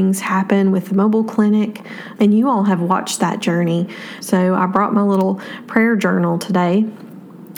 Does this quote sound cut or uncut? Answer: cut